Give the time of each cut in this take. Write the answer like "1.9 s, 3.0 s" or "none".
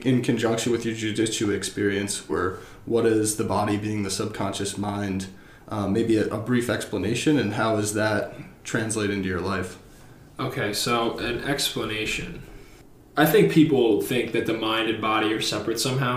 2.3 s

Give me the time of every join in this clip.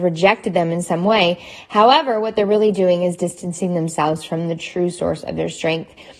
none

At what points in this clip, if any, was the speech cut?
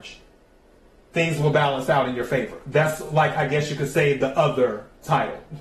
none

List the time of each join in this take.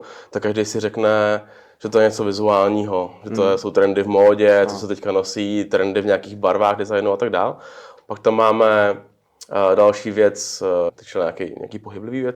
8.0 s, 10.9 s

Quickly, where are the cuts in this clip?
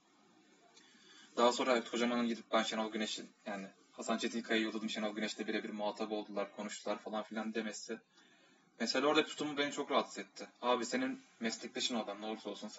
none

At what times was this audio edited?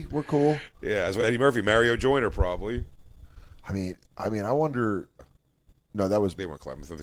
5.2 s

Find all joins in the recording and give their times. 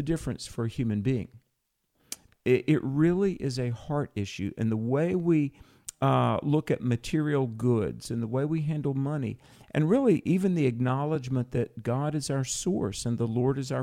2.3 s

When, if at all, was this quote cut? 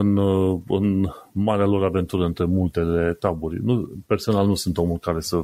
none

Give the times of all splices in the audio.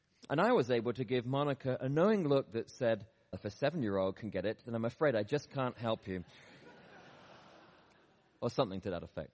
3.3 s

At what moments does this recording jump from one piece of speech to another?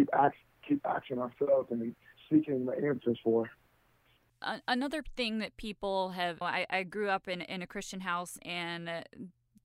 4.3 s, 6.4 s

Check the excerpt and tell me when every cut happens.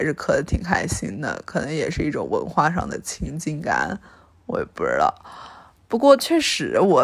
none

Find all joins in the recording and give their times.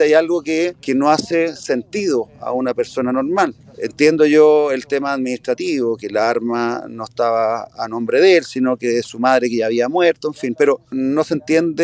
none

